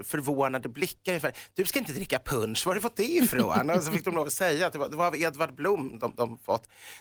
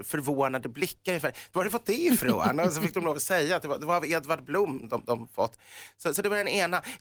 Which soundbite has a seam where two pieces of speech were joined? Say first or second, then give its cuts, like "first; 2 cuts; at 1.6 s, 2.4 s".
second; 1 cut; at 1.5 s